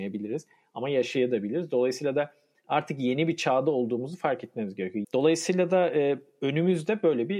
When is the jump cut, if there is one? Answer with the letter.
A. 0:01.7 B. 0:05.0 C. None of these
B